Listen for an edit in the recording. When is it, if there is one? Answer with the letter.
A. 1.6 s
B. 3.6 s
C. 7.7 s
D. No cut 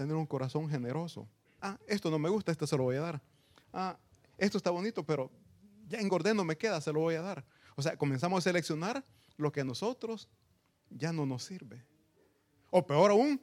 A